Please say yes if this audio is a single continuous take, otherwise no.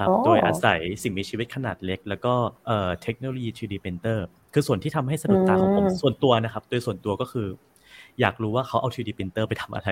no